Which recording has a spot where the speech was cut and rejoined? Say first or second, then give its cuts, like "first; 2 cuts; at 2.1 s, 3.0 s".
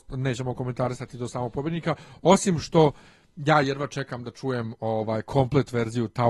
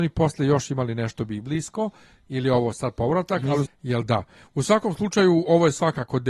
second; 1 cut; at 3.7 s